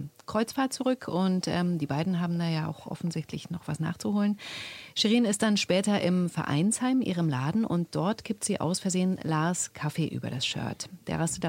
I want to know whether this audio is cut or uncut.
uncut